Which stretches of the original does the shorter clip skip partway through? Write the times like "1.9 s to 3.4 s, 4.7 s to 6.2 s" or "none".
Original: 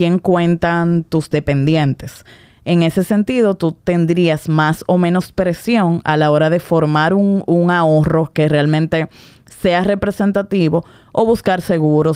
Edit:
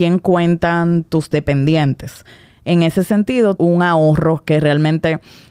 3.6 s to 7.4 s